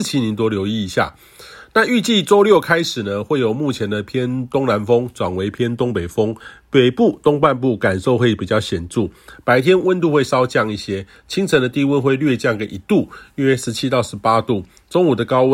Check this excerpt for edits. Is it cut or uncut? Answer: uncut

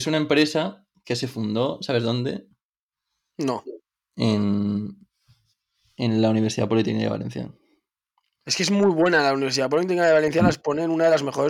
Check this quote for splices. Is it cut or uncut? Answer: uncut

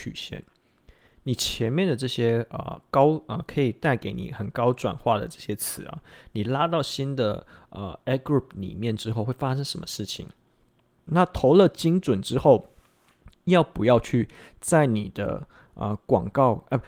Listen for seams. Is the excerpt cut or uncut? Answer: cut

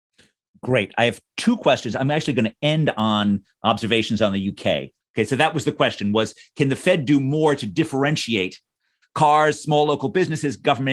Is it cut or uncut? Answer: cut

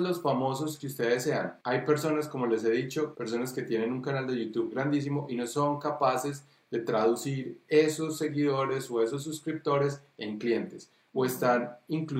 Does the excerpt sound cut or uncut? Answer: cut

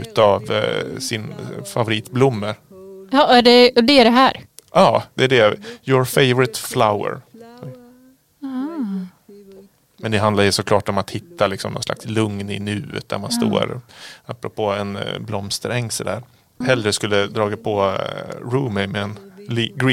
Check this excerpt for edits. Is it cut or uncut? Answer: cut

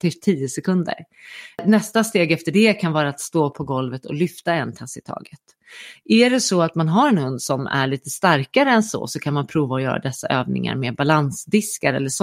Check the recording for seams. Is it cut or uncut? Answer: uncut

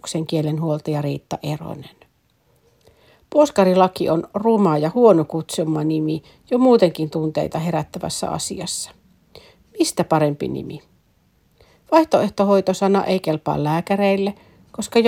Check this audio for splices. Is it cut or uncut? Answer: uncut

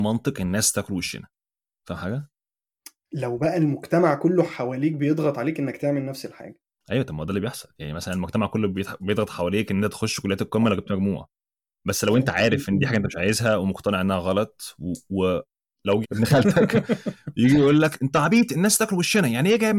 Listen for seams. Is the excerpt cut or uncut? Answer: cut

